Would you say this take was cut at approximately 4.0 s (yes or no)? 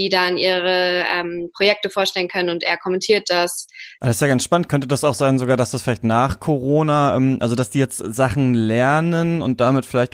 yes